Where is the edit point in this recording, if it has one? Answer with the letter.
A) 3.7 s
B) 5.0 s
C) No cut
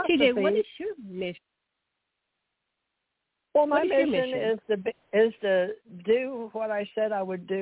C